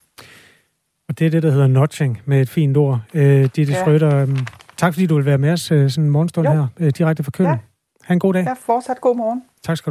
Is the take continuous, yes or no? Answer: yes